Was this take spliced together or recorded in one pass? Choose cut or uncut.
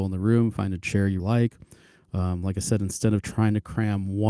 cut